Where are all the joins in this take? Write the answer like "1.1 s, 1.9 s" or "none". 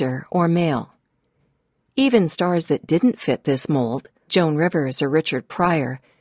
4.3 s